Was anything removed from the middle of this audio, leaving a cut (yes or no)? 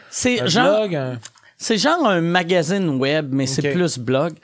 no